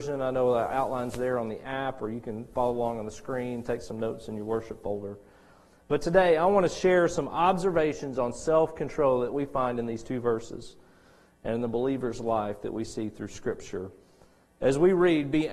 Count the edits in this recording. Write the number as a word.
zero